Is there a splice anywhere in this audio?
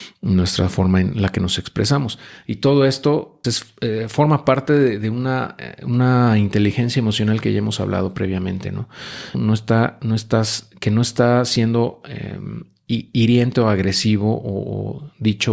yes; 2 cuts; at 3.4 s, 9.3 s

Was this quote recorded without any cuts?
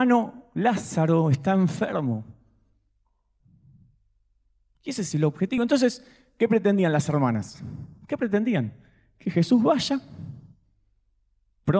yes; 0 cuts

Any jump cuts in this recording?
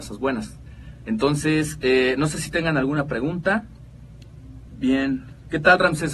no; 0 cuts

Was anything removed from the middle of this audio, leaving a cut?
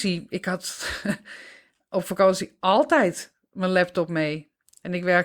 no; 0 cuts

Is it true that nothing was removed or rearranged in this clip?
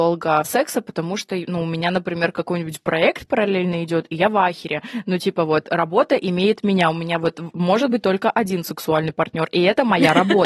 yes; 0 cuts

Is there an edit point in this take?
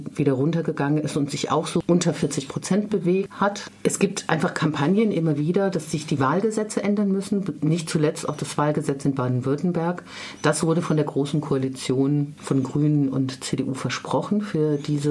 no; 0 cuts

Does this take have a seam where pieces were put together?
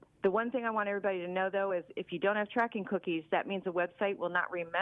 no; 0 cuts

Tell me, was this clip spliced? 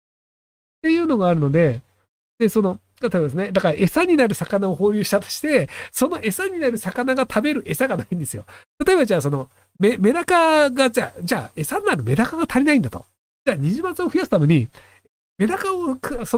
no; 0 cuts

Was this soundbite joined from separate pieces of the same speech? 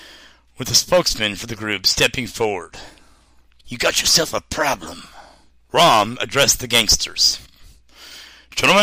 yes; 2 cuts; at 3.6 s, 5.6 s

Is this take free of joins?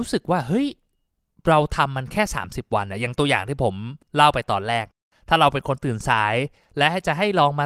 yes; 0 cuts

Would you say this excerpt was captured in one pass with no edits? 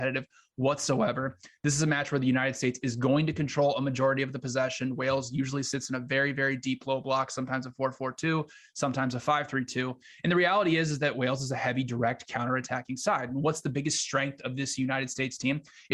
yes; 0 cuts

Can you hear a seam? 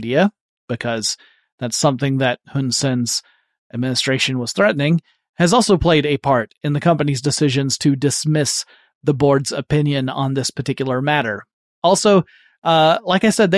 no; 0 cuts

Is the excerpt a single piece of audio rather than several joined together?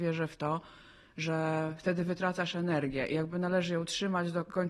yes; 0 cuts

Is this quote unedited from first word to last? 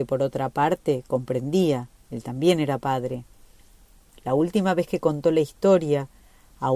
yes; 0 cuts

